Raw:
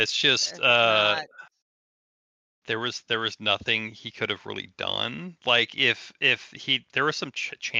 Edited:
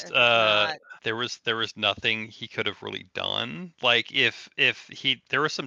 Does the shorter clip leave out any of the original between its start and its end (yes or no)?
yes